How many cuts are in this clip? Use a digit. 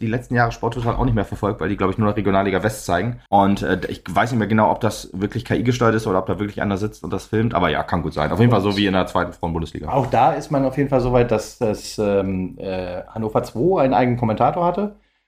1